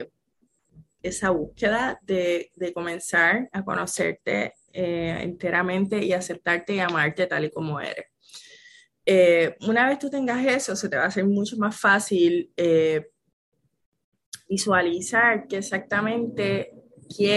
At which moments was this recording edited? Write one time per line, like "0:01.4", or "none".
0:01.0